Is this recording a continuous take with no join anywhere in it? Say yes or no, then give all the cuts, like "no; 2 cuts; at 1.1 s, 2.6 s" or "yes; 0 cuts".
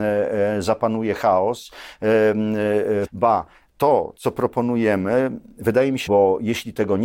no; 2 cuts; at 3.1 s, 6.1 s